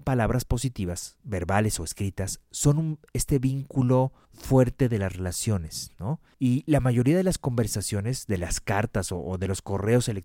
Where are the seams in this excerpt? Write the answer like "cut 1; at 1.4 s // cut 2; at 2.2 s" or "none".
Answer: none

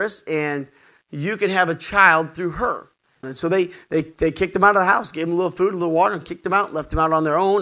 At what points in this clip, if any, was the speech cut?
cut 1; at 3.2 s

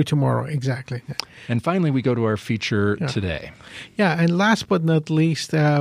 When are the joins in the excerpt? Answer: none

